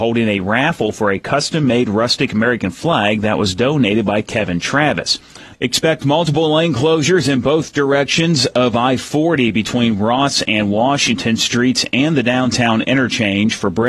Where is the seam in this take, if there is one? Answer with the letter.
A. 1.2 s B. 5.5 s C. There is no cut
B